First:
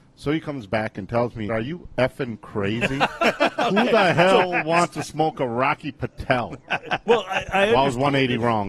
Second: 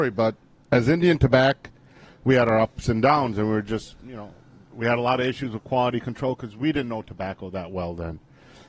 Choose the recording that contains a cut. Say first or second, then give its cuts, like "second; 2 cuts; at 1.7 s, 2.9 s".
first; 1 cut; at 1.5 s